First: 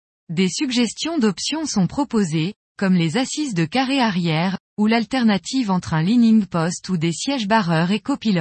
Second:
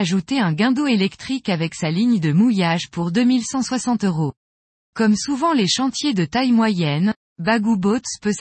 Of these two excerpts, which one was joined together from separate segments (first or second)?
second